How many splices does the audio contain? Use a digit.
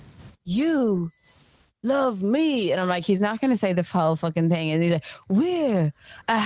0